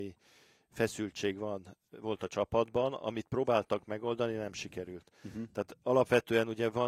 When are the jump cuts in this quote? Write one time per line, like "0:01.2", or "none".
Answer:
none